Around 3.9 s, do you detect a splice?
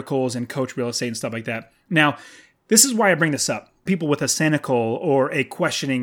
yes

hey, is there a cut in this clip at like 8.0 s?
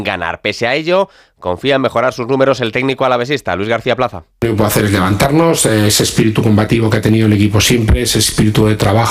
no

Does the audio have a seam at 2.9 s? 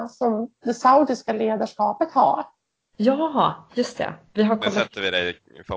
yes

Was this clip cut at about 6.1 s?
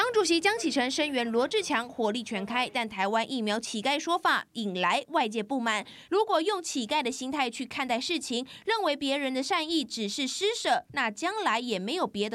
yes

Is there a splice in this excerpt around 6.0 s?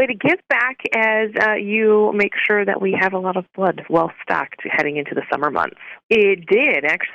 yes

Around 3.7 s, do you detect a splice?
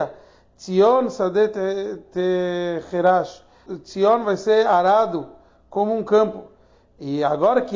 yes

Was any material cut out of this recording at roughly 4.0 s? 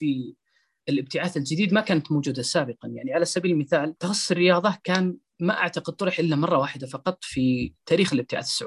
yes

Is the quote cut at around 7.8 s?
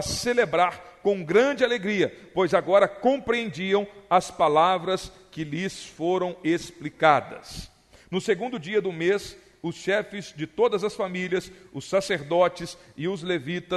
no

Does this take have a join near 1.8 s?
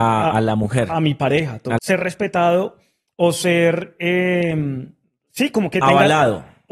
yes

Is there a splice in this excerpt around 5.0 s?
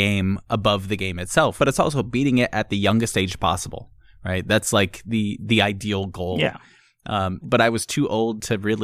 no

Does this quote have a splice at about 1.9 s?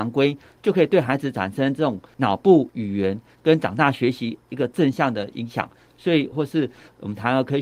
no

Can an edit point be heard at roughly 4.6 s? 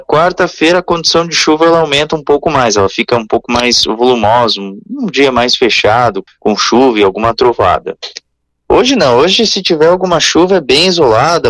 no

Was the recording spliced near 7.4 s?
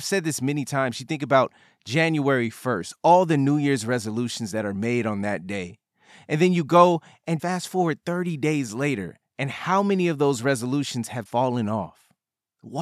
yes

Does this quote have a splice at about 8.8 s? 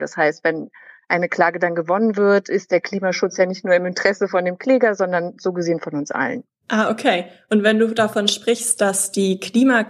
no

